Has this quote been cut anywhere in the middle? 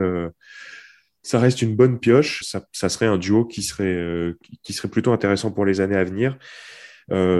yes; 1 cut; at 2.4 s

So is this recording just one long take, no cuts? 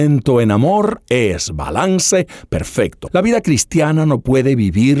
no; 1 cut; at 3.1 s

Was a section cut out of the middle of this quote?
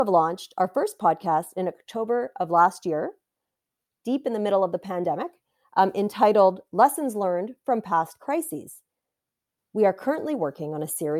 yes; 1 cut; at 9.6 s

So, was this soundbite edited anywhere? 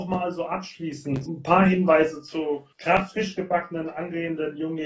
yes; 2 cuts; at 1.3 s, 2.7 s

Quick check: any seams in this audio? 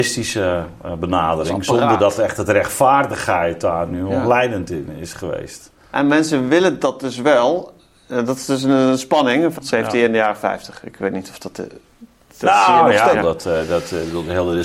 yes; 2 cuts; at 9.6 s, 13.1 s

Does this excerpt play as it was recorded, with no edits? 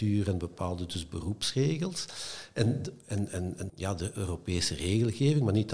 no; 1 cut; at 3.7 s

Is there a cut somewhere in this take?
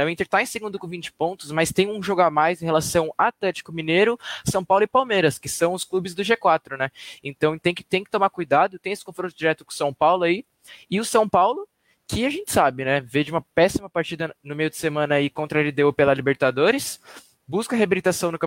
no; 0 cuts

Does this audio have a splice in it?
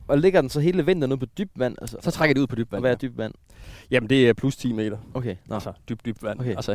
no; 0 cuts

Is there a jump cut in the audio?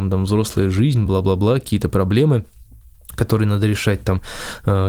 no; 0 cuts

